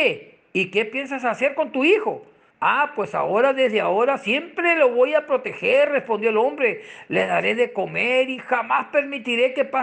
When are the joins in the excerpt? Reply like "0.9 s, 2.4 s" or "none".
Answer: 2.5 s